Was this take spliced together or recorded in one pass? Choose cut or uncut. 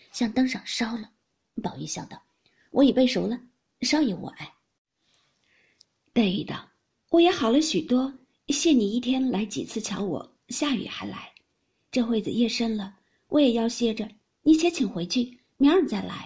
uncut